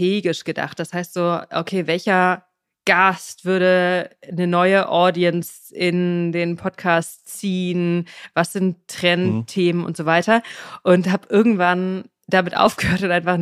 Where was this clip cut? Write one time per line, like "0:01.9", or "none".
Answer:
none